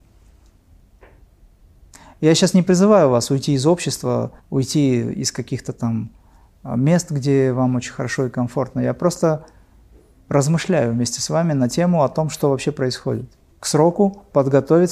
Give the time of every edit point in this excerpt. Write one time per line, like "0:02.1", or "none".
0:04.4
0:13.5